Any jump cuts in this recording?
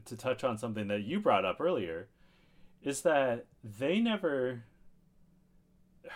no; 0 cuts

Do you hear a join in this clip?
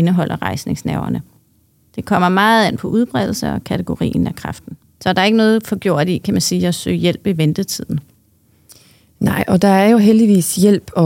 yes; 1 cut; at 4.8 s

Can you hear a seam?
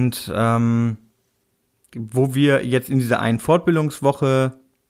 no; 0 cuts

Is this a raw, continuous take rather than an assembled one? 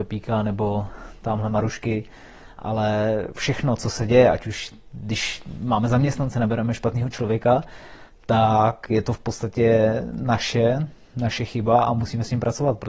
yes; 0 cuts

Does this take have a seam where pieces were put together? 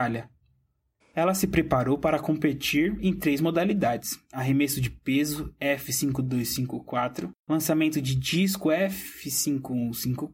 yes; 2 cuts; at 1.0 s, 7.4 s

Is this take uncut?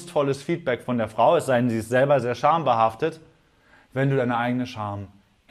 no; 1 cut; at 2.2 s

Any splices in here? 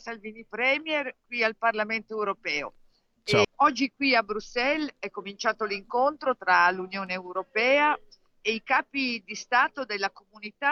yes; 1 cut; at 3.4 s

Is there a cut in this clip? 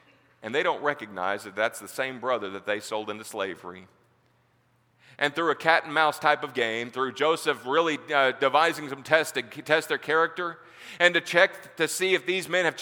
no; 0 cuts

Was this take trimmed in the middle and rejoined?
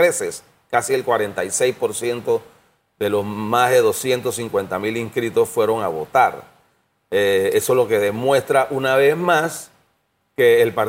no; 0 cuts

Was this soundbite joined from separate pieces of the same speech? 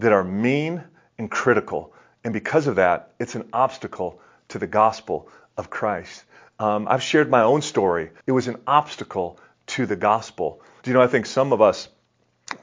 yes; 2 cuts; at 8.2 s, 10.8 s

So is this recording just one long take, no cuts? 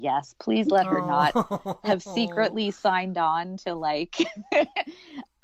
yes; 0 cuts

